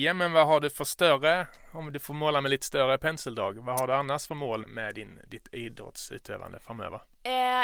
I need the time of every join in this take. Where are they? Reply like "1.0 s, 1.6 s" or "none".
4.6 s